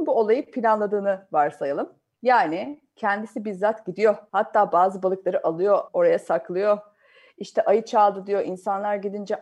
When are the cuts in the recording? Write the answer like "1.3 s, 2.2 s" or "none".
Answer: 4.3 s, 5.9 s